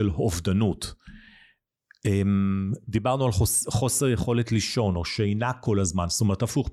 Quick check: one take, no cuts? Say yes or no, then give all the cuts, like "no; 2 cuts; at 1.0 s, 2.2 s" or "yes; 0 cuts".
yes; 0 cuts